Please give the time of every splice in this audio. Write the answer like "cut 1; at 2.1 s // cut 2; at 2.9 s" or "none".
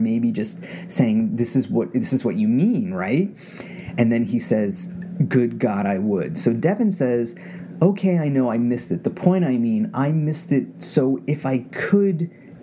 none